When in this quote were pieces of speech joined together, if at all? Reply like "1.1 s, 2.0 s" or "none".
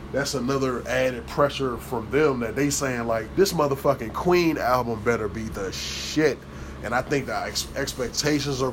3.3 s